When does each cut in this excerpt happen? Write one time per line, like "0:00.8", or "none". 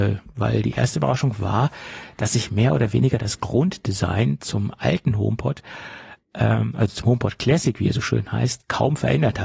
none